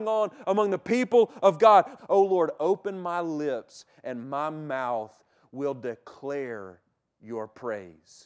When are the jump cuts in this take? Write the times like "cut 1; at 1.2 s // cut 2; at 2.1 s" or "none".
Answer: cut 1; at 2.0 s